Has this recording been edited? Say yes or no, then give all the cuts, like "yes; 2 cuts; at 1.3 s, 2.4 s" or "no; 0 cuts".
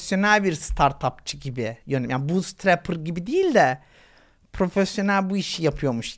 no; 0 cuts